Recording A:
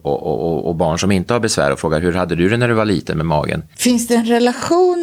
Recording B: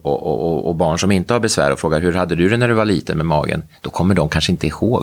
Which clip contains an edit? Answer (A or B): A